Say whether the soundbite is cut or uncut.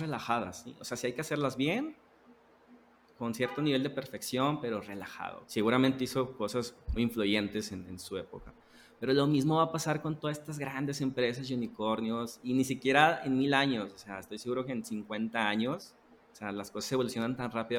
cut